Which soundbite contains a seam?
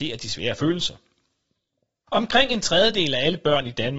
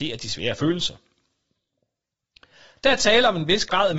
first; 1 cut; at 2.1 s

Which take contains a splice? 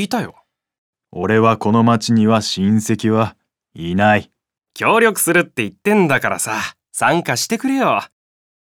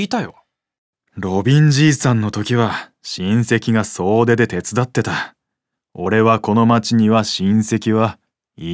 first; 2 cuts; at 1.0 s, 4.6 s

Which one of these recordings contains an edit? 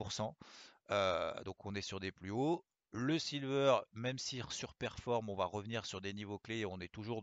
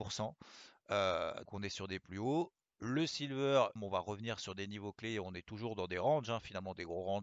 second; 2 cuts; at 1.5 s, 3.8 s

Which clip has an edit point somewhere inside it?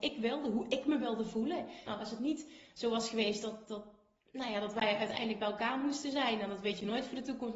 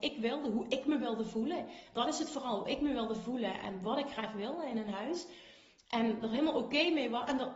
first; 2 cuts; at 1.9 s, 3.7 s

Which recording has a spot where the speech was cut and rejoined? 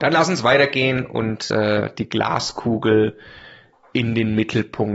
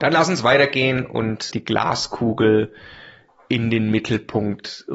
second; 1 cut; at 1.5 s

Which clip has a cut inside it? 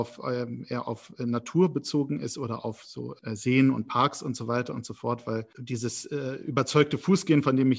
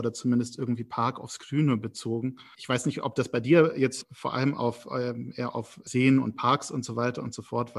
second; 3 cuts; at 2.5 s, 4.0 s, 5.9 s

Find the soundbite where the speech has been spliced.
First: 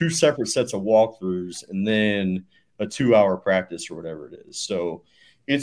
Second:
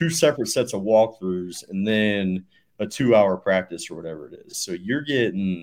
second; 1 cut; at 4.5 s

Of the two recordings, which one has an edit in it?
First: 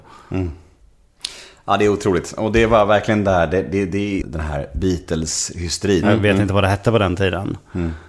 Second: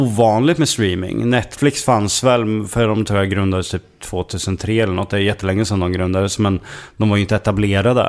first; 2 cuts; at 4.2 s, 6.0 s

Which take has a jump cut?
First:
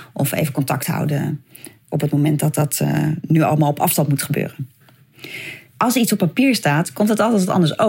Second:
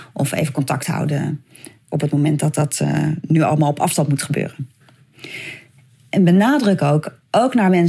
first; 1 cut; at 5.8 s

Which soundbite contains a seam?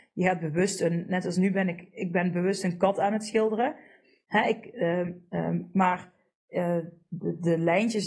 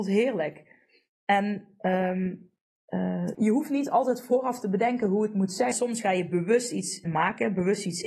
second; 3 cuts; at 3.3 s, 5.7 s, 7.0 s

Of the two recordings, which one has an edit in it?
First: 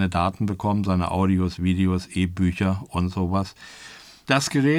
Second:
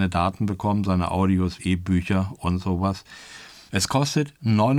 second; 2 cuts; at 1.6 s, 3.7 s

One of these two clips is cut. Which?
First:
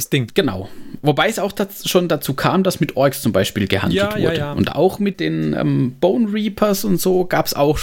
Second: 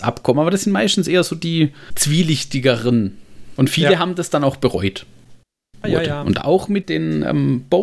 second; 2 cuts; at 3.6 s, 5.8 s

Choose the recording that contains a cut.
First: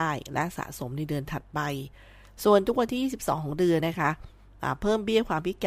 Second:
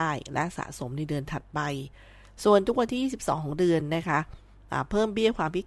first; 1 cut; at 3.8 s

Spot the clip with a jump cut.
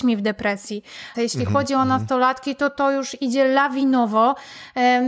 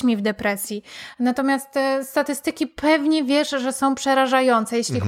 first; 1 cut; at 1.1 s

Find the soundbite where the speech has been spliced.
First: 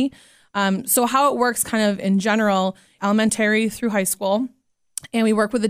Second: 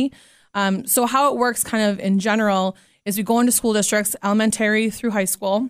first; 1 cut; at 3.0 s

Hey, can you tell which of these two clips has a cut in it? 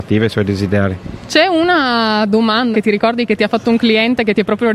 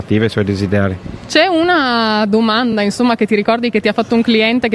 first; 1 cut; at 2.7 s

